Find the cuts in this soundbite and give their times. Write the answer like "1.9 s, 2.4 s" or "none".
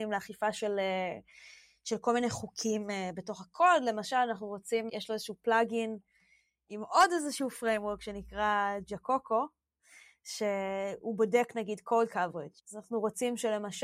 4.9 s, 12.6 s